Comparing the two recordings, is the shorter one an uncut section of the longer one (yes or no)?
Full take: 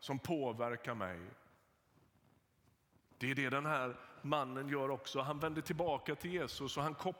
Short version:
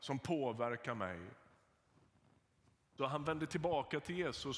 no